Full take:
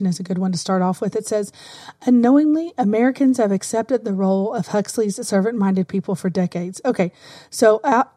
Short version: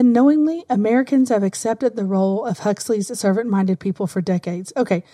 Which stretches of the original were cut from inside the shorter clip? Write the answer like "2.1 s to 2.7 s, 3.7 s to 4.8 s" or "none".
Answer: none